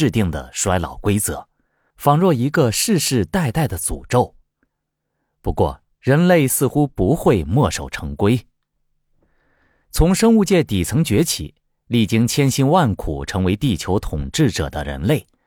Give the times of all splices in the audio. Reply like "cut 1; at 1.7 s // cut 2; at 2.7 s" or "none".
cut 1; at 5.9 s